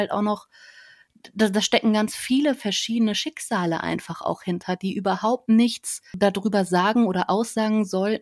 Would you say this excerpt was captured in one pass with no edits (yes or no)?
yes